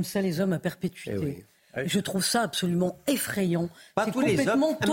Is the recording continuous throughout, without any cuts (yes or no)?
yes